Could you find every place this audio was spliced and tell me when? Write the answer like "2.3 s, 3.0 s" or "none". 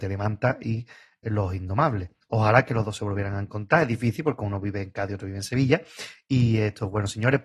none